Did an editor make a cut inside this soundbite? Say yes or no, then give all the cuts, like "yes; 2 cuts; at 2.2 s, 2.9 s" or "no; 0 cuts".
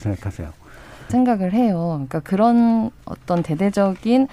yes; 1 cut; at 1.1 s